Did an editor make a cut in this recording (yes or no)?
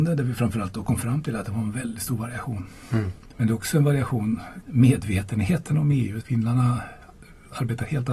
yes